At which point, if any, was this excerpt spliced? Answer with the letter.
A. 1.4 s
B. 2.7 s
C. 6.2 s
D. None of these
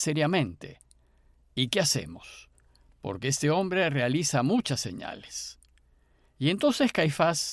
D